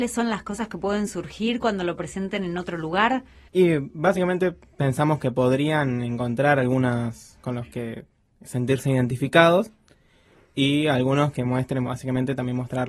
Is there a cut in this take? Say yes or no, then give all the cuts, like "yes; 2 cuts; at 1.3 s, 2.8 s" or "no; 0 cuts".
yes; 2 cuts; at 7.4 s, 11.8 s